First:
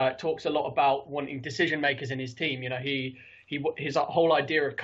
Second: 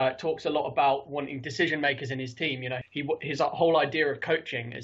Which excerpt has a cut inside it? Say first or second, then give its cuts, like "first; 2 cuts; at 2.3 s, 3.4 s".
second; 1 cut; at 2.8 s